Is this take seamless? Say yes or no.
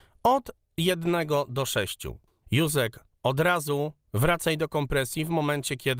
no